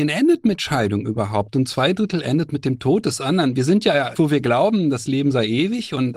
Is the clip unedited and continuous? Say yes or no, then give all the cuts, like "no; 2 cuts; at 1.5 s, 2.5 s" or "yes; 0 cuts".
no; 1 cut; at 4.1 s